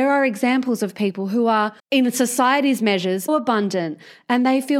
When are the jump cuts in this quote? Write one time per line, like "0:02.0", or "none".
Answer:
0:01.8
0:03.3